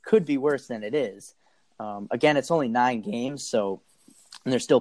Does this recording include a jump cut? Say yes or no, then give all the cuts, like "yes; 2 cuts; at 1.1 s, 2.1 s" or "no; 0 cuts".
no; 0 cuts